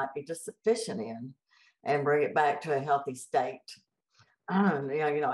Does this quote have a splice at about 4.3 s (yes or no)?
no